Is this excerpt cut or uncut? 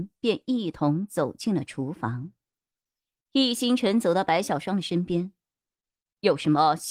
uncut